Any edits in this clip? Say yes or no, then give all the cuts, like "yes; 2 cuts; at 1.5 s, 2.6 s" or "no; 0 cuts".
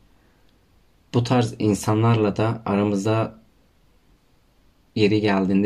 no; 0 cuts